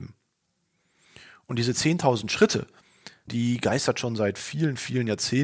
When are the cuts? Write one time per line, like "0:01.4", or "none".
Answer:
0:03.3